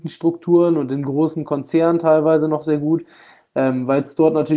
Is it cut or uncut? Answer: uncut